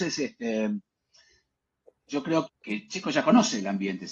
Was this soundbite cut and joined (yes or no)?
yes